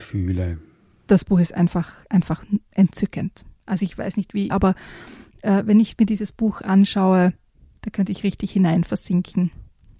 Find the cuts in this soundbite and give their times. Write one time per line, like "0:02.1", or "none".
0:04.5